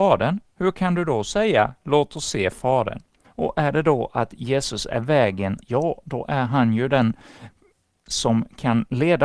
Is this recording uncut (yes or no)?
no